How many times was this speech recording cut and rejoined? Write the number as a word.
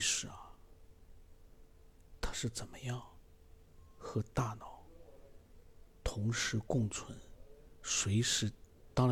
zero